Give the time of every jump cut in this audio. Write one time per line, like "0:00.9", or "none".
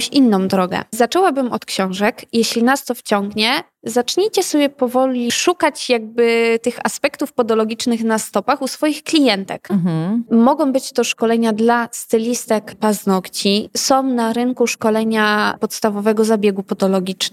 0:09.7